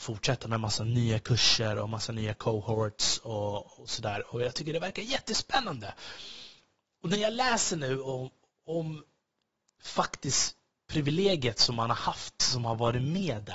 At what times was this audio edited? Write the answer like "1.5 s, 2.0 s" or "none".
none